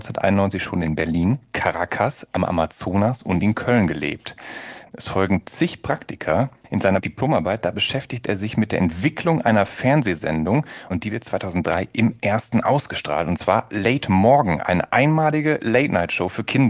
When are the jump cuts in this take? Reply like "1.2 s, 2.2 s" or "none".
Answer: 4.9 s, 6.6 s